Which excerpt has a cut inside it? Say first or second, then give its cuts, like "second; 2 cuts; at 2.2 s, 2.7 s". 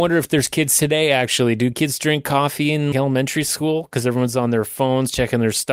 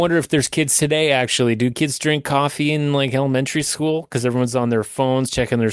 first; 1 cut; at 2.9 s